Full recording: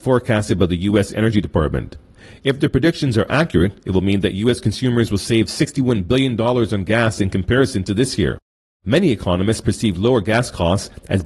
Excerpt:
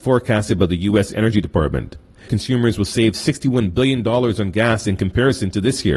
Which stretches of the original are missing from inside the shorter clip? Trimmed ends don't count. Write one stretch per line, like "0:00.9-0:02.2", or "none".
0:02.3-0:04.6